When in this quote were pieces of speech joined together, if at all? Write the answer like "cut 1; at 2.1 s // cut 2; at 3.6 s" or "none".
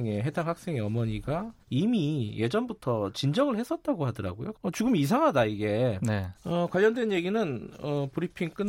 cut 1; at 1.6 s // cut 2; at 4.5 s // cut 3; at 6.3 s